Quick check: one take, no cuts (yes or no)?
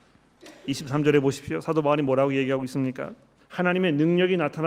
no